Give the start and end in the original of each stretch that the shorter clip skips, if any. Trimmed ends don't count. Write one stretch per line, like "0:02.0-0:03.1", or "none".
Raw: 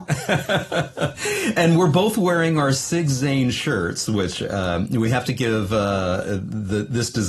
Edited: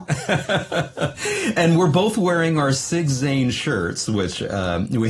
none